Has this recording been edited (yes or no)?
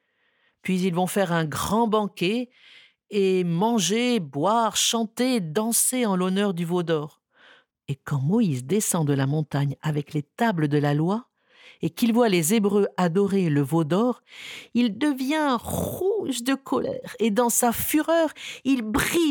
yes